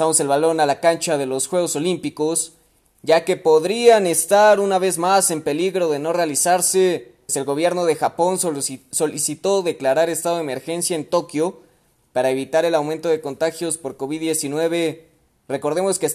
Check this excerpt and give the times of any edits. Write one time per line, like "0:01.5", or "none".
0:07.3